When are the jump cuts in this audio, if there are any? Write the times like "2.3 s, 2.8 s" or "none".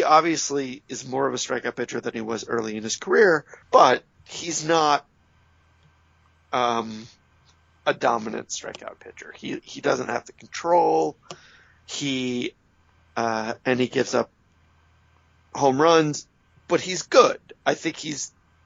3.6 s